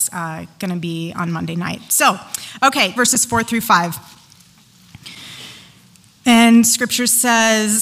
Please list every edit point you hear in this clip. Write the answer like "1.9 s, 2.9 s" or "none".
3.0 s